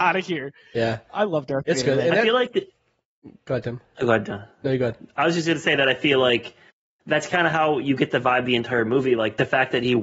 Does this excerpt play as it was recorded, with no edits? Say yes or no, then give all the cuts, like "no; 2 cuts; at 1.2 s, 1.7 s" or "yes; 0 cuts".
yes; 0 cuts